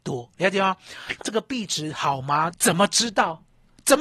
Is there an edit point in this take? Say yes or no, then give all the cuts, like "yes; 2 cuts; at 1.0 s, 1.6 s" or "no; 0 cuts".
yes; 2 cuts; at 1.2 s, 2.5 s